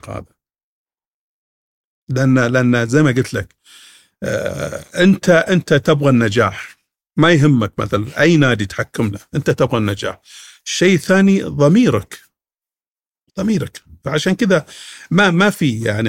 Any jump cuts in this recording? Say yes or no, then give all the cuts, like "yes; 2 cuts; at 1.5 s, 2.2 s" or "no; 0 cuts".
no; 0 cuts